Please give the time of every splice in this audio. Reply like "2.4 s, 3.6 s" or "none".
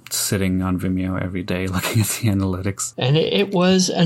2.9 s